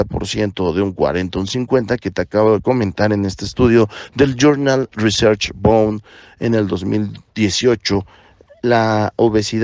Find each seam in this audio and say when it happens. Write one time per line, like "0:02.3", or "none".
0:08.5